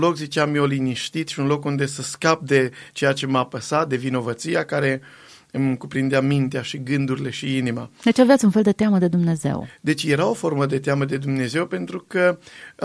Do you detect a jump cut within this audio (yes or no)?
no